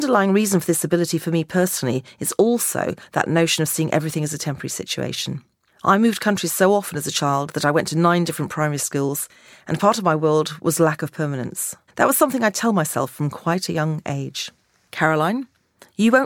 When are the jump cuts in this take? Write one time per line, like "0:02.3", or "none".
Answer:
0:11.9